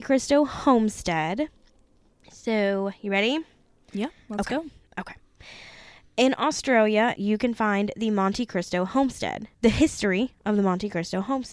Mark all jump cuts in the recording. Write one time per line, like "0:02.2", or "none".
0:07.1
0:09.5